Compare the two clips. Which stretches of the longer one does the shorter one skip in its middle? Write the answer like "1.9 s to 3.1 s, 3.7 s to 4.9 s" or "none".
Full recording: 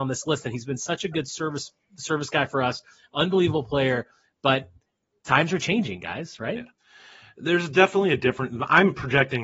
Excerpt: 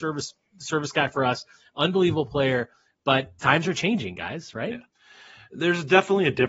4.7 s to 5.2 s